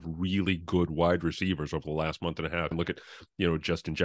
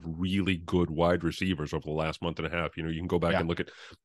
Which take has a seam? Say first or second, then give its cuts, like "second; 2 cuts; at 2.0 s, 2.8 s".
first; 1 cut; at 2.7 s